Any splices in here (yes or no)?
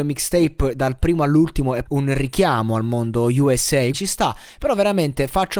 yes